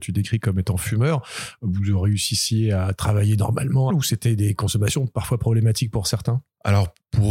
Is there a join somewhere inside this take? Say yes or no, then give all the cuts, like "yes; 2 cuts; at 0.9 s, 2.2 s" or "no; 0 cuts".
yes; 1 cut; at 3.9 s